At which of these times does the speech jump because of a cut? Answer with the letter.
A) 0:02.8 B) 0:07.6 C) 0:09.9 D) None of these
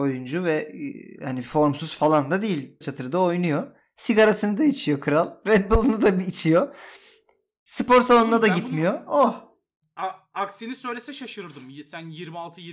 A